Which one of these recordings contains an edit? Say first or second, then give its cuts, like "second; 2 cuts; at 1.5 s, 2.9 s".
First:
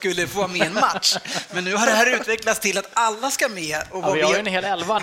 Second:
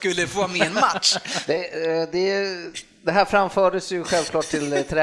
second; 1 cut; at 1.5 s